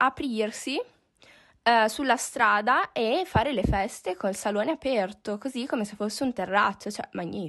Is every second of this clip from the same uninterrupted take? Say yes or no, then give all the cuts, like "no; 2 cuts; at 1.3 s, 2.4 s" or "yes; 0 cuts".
yes; 0 cuts